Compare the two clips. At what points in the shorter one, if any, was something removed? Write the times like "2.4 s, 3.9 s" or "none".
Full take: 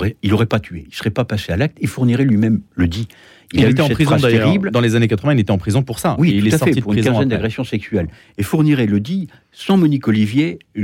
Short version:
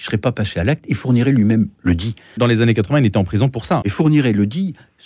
2.4 s, 3.8 s